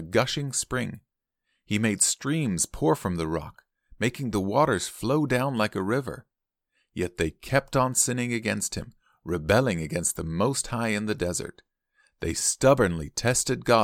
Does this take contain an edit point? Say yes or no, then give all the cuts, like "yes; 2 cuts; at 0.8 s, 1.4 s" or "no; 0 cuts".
no; 0 cuts